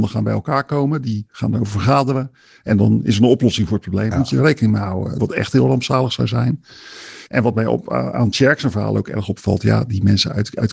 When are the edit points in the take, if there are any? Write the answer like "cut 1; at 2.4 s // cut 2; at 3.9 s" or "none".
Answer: cut 1; at 4.1 s // cut 2; at 5.2 s // cut 3; at 7.3 s